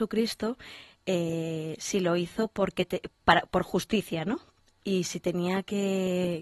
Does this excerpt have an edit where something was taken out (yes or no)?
yes